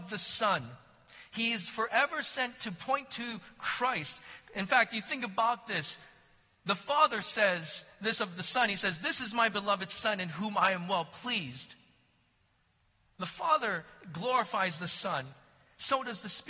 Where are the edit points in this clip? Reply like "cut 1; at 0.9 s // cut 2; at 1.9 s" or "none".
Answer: none